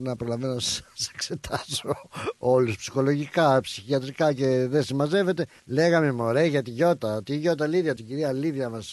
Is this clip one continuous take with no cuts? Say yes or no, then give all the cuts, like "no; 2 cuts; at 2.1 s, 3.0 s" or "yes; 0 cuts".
no; 2 cuts; at 5.6 s, 8.0 s